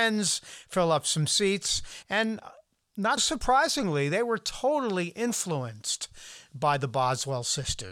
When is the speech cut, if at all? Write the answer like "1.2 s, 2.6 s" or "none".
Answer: 2.0 s, 3.2 s